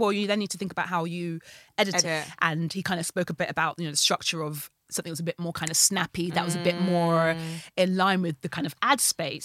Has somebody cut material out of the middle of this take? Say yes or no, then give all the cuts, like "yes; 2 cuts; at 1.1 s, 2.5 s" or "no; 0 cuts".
yes; 1 cut; at 2.0 s